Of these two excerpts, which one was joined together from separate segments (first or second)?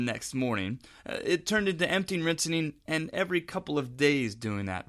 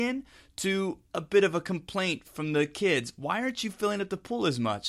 second